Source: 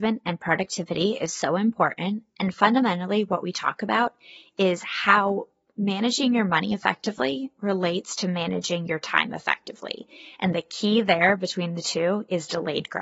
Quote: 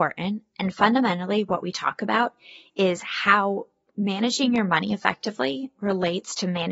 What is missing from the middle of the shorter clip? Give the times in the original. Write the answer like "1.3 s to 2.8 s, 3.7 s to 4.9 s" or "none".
none